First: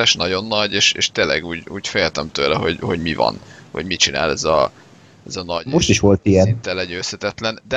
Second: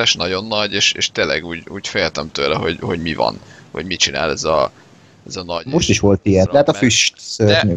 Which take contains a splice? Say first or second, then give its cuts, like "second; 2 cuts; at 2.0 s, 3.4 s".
second; 1 cut; at 6.5 s